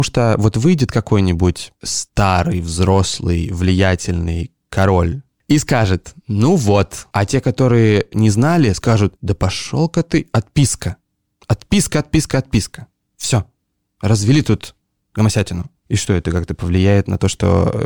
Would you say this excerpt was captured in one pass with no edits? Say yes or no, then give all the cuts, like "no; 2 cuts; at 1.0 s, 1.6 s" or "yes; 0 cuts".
no; 1 cut; at 7.1 s